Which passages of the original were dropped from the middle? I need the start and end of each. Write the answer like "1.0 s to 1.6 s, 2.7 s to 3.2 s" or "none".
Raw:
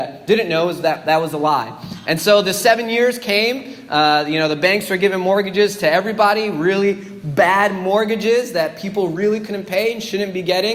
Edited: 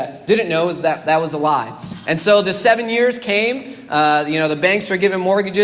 none